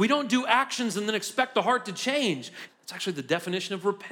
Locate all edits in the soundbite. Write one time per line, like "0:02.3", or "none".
0:02.7

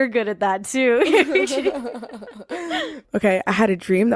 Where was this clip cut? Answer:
0:03.0

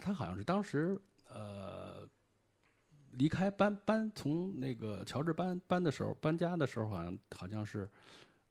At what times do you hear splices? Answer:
none

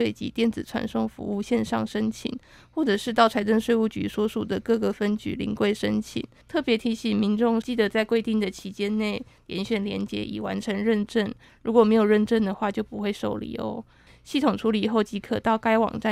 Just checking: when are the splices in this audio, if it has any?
0:06.4
0:07.6
0:14.1

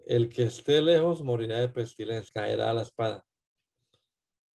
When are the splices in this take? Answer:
0:02.3

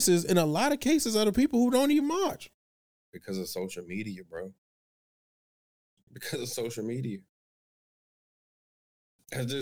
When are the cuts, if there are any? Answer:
none

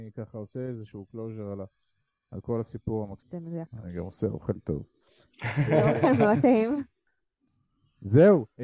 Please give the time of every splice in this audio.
0:03.2

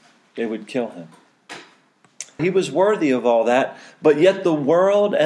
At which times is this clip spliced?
0:02.4

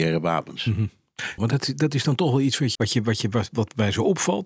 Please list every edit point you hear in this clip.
0:01.4
0:02.7

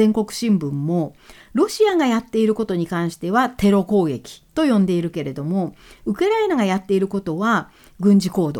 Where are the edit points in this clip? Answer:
0:04.5

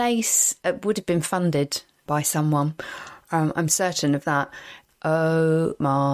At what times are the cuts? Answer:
0:02.1
0:04.9

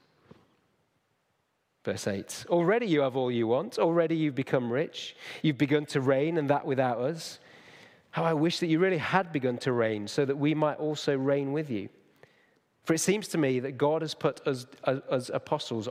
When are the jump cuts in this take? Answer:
none

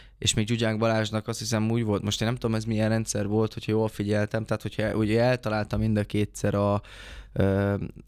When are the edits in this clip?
none

